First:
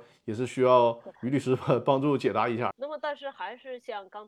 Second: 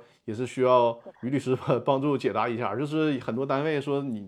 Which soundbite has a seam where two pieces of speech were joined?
first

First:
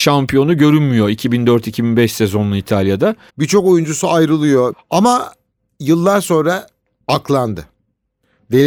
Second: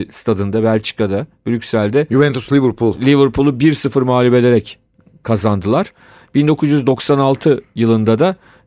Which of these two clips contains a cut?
first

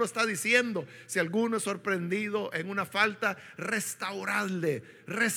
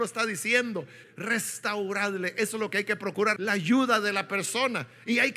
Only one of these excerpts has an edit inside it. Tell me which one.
second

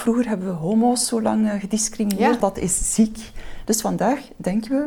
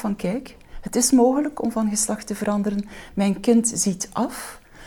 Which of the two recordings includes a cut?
first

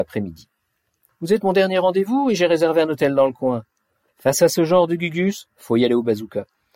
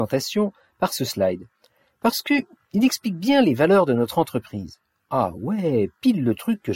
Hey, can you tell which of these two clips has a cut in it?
first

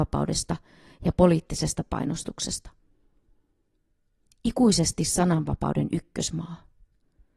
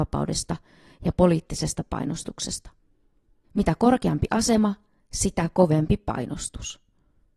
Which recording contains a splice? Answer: second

